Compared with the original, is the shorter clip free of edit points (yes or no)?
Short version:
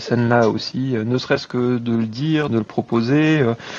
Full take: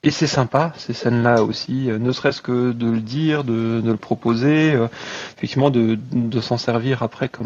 no